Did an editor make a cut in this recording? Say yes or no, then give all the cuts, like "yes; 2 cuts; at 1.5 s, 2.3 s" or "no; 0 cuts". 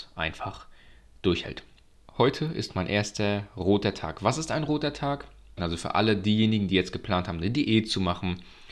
yes; 2 cuts; at 2.0 s, 5.6 s